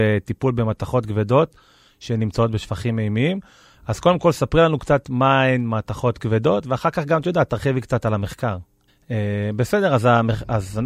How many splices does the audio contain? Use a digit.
1